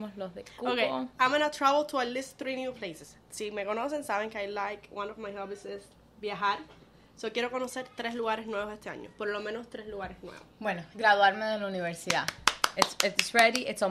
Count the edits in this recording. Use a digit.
1